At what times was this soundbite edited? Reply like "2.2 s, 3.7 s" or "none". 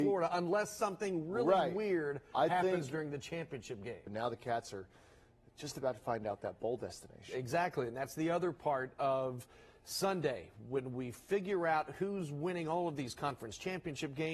4.1 s